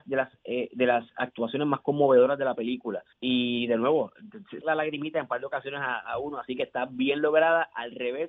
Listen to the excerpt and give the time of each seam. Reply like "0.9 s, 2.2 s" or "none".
3.1 s, 4.6 s